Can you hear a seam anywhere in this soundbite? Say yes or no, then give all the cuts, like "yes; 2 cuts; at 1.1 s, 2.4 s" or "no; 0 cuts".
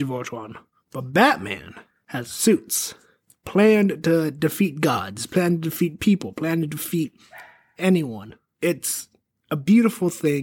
no; 0 cuts